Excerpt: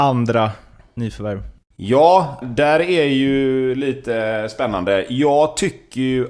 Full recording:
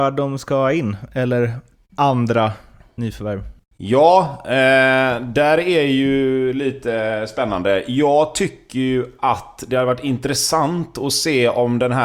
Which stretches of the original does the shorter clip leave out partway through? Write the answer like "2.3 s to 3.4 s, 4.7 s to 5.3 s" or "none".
4.4 s to 5.2 s